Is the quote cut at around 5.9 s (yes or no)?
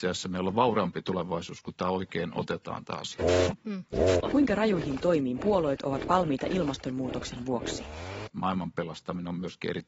no